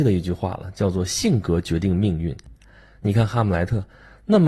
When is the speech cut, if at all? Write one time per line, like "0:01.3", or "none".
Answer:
none